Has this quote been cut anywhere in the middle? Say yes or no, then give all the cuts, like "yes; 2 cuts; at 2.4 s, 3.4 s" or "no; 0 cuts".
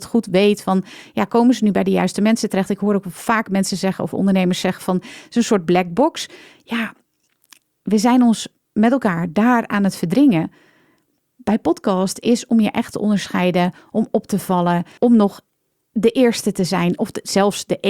yes; 1 cut; at 15.0 s